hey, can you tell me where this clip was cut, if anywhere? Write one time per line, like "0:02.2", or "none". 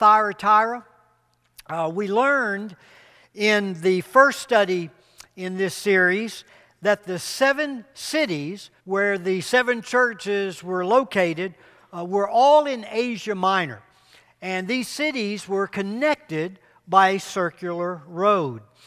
0:08.8